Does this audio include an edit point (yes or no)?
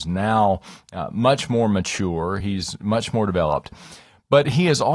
no